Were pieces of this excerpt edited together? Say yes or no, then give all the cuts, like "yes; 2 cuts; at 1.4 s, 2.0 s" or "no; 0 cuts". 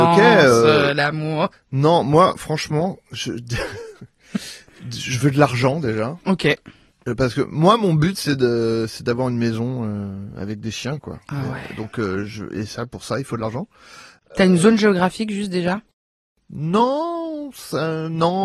yes; 1 cut; at 1.5 s